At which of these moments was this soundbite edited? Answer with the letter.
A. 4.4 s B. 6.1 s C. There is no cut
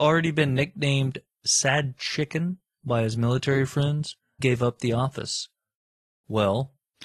A